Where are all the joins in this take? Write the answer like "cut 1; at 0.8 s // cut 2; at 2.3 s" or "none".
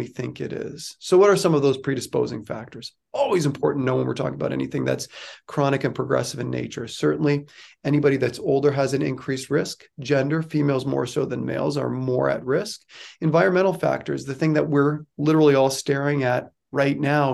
none